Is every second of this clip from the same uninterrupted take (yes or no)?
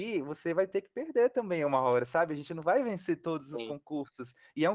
yes